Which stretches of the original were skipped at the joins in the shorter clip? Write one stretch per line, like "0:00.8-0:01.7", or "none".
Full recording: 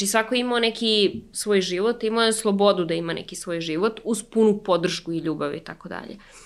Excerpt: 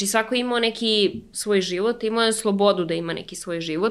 none